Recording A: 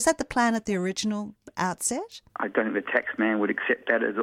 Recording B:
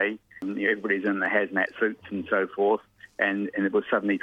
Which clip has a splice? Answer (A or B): A